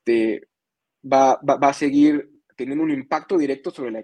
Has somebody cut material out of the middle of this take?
no; 0 cuts

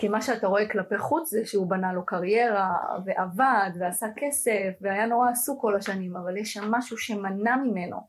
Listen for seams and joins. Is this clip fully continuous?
yes; 0 cuts

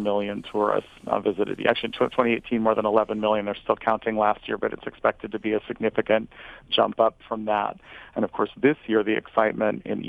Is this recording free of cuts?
yes; 0 cuts

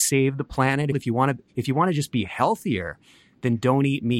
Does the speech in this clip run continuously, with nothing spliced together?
no; 1 cut; at 0.9 s

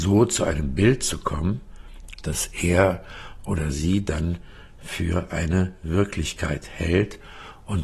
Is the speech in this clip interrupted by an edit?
no; 0 cuts

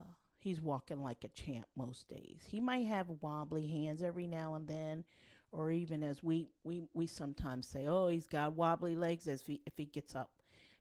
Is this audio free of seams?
yes; 0 cuts

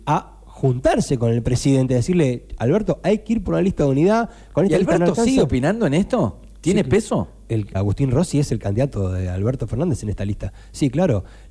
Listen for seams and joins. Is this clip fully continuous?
no; 1 cut; at 7.7 s

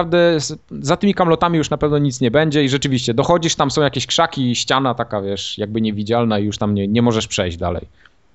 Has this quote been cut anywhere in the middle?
no; 0 cuts

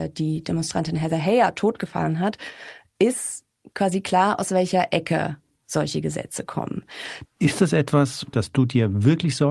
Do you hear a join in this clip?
yes; 2 cuts; at 7.2 s, 8.3 s

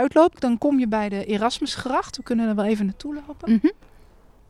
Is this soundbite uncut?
yes; 0 cuts

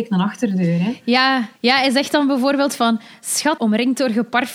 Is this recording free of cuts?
no; 2 cuts; at 1.6 s, 3.6 s

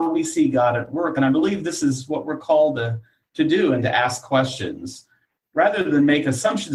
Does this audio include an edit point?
no; 0 cuts

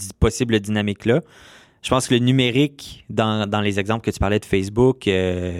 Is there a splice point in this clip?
no; 0 cuts

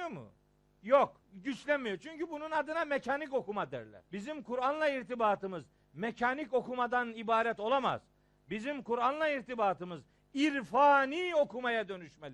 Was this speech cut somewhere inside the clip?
yes; 2 cuts; at 1.2 s, 4.1 s

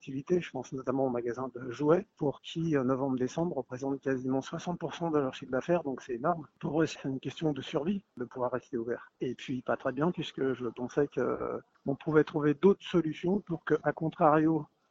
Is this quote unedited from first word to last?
no; 1 cut; at 9.1 s

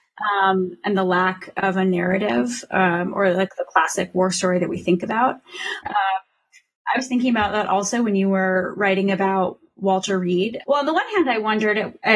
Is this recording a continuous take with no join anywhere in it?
no; 2 cuts; at 5.8 s, 10.6 s

